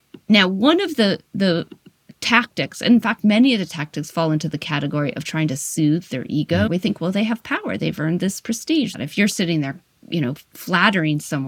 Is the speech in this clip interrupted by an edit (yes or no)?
yes